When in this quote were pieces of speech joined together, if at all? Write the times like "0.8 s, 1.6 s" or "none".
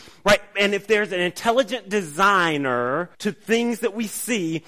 3.1 s